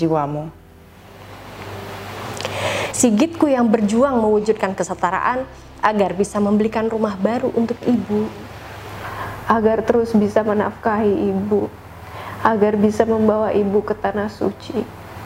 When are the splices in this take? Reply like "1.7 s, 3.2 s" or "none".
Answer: 2.9 s